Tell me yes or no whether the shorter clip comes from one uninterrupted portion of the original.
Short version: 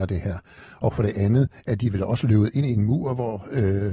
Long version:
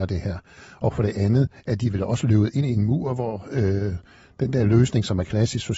yes